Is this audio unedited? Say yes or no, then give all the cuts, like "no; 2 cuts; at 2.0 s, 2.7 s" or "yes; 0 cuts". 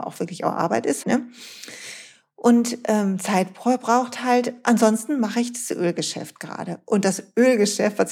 no; 1 cut; at 1.0 s